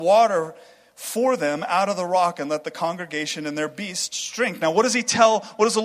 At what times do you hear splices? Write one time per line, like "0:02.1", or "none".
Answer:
none